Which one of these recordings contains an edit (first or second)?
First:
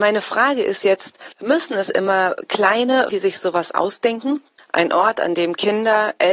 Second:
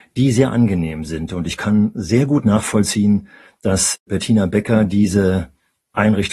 first